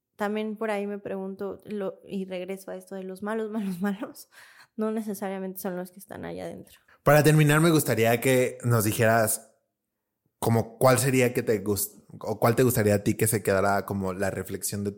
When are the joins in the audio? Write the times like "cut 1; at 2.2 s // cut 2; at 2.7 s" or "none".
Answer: cut 1; at 6.9 s